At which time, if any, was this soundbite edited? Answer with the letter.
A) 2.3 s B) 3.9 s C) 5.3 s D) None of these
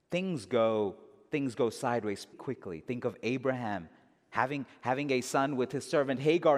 A